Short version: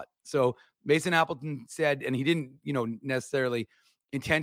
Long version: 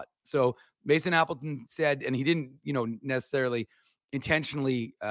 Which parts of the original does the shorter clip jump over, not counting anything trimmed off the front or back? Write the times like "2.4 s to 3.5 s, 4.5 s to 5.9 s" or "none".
none